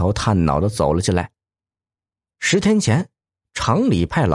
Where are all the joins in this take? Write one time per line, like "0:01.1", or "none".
0:02.3

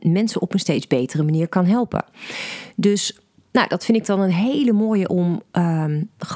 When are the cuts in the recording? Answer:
none

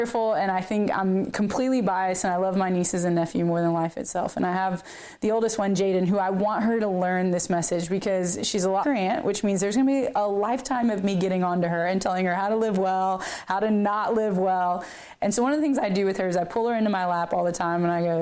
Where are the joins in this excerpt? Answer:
0:08.8

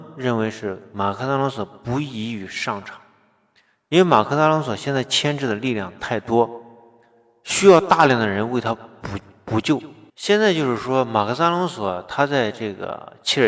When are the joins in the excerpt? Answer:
0:10.1

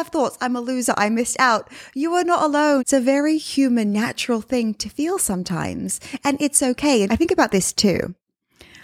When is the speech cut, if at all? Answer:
0:02.8
0:07.1

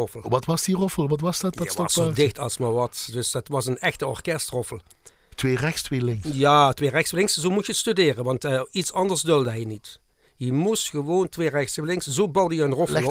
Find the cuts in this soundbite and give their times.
none

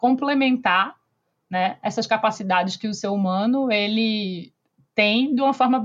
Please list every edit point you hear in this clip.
none

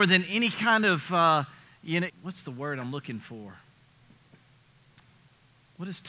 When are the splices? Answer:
0:02.1

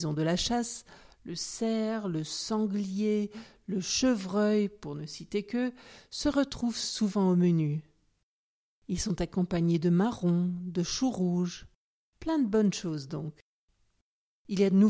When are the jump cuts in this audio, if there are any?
none

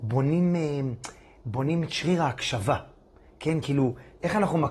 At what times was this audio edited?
none

